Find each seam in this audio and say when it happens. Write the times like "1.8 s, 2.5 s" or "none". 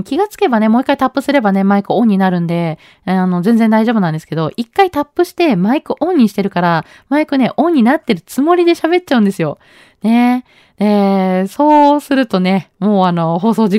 none

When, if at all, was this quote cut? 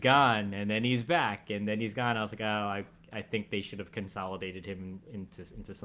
none

